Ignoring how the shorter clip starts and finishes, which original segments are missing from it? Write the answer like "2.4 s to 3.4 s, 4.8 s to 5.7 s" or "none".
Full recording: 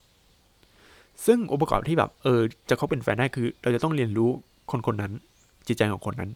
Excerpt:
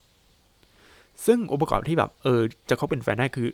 none